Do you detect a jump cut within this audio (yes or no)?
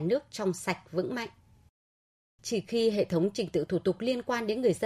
yes